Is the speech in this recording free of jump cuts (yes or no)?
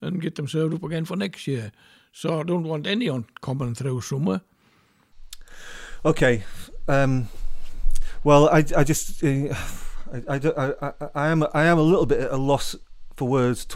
yes